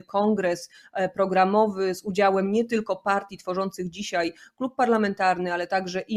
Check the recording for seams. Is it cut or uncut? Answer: uncut